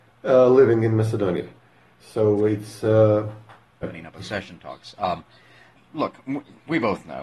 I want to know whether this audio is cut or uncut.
cut